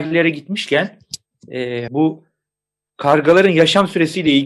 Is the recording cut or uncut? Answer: cut